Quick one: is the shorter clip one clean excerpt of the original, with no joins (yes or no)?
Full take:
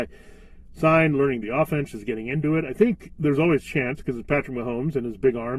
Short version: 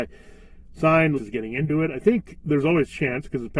no